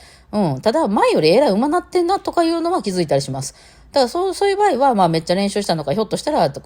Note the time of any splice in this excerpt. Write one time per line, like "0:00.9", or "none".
none